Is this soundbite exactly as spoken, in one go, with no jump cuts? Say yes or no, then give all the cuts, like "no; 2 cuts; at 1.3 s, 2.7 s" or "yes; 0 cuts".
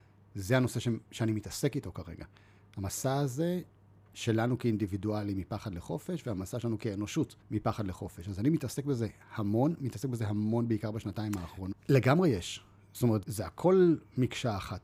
no; 3 cuts; at 7.4 s, 11.7 s, 13.2 s